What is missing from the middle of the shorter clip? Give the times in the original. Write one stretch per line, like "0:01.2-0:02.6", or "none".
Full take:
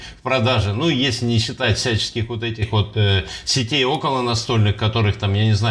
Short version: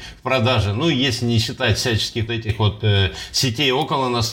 0:02.3-0:02.4